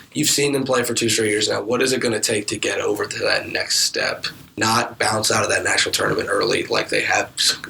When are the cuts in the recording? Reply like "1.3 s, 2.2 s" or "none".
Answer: none

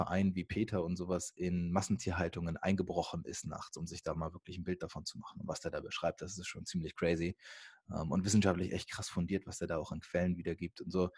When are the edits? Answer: none

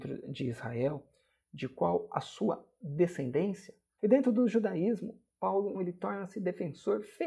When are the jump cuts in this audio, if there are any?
4.0 s, 5.7 s

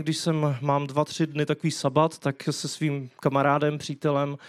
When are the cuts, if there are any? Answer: none

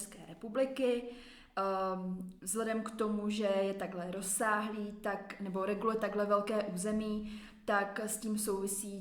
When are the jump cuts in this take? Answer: none

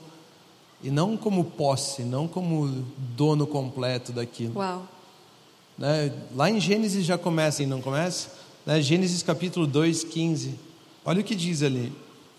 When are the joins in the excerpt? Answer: 7.6 s, 11.0 s

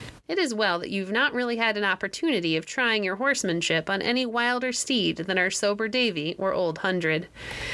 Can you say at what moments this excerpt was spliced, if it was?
none

